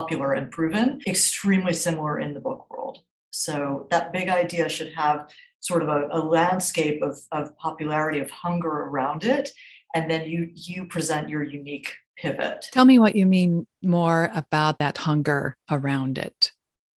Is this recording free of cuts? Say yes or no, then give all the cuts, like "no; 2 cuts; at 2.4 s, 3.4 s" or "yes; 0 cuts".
yes; 0 cuts